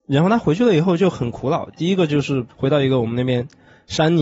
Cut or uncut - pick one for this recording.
cut